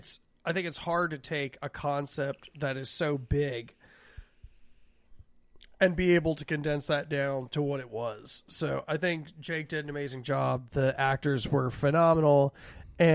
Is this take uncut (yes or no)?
yes